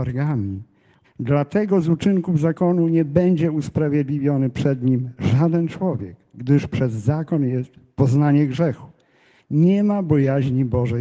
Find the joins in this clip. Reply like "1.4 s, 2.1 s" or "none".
1.0 s, 9.4 s